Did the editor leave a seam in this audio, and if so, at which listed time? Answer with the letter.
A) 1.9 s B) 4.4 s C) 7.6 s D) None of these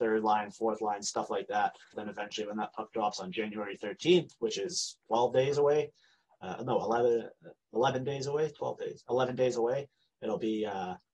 A